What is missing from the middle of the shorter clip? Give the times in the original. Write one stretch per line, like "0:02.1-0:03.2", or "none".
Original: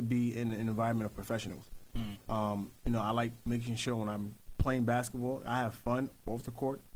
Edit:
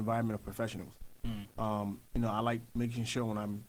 none